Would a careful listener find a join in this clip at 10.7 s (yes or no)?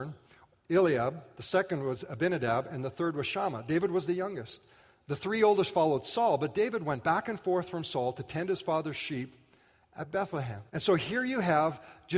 yes